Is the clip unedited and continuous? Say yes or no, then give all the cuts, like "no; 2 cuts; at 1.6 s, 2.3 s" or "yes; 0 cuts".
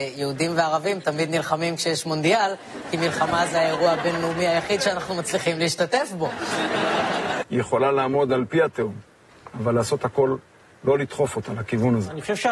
no; 1 cut; at 7.4 s